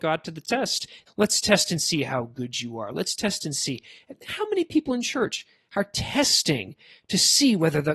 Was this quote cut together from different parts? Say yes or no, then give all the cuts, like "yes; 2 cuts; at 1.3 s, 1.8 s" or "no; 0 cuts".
yes; 1 cut; at 1.1 s